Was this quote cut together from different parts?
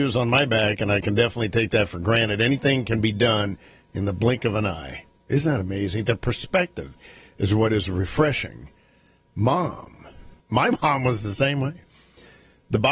yes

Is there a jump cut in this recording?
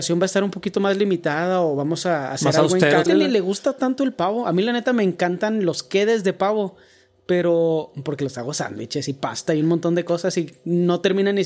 yes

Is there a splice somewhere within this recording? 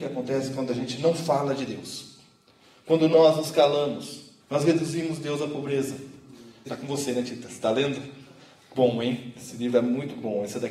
yes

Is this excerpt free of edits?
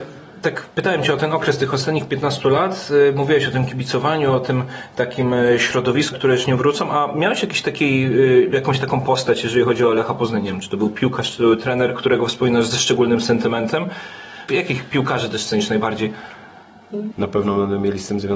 no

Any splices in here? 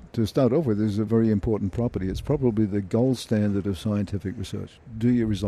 yes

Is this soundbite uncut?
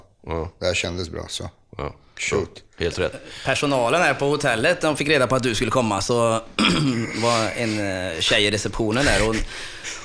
yes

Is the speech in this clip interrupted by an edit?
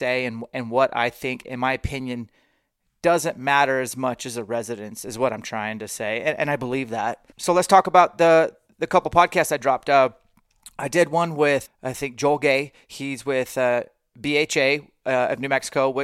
yes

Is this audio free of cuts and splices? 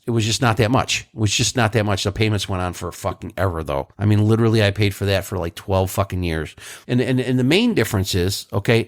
no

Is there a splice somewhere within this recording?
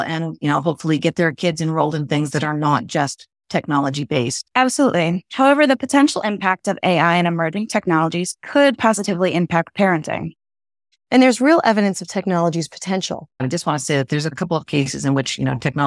yes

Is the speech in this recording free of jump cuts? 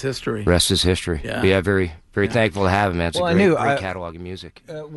yes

